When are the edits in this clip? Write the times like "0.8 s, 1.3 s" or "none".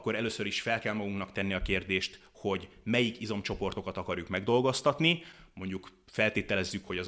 none